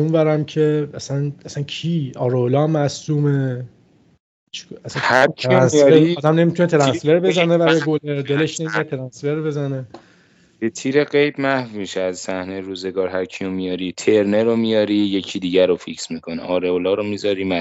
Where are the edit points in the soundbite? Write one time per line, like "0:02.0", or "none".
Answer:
none